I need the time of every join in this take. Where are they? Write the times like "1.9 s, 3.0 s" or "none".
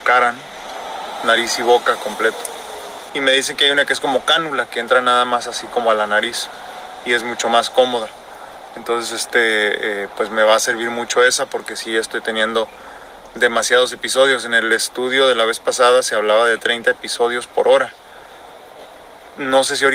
3.1 s